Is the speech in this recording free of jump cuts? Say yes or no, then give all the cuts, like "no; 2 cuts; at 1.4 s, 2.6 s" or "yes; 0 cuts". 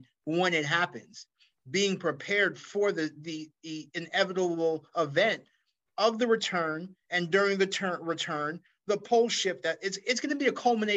yes; 0 cuts